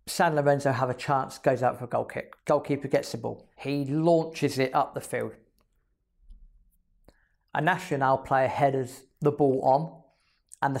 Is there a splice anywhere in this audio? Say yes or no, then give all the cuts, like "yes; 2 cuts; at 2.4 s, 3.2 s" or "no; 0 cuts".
yes; 2 cuts; at 2.4 s, 3.5 s